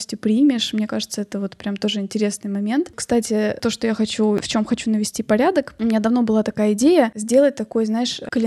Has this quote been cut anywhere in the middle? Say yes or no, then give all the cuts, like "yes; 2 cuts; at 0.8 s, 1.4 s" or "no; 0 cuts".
no; 0 cuts